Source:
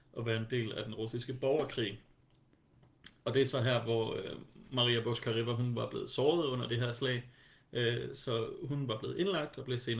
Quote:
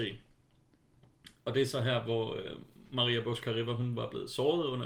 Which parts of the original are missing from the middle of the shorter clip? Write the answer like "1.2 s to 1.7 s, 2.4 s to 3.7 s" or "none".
none